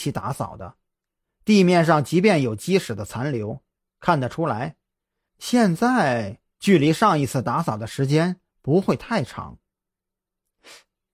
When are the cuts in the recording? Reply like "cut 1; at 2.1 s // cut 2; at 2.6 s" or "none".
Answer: cut 1; at 3.8 s